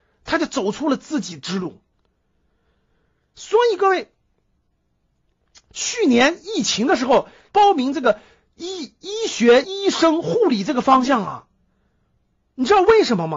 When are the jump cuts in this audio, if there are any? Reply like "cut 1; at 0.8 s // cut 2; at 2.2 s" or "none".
cut 1; at 7.5 s // cut 2; at 9.6 s